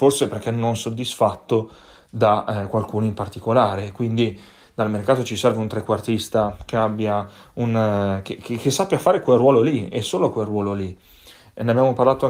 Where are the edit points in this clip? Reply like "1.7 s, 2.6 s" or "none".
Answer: none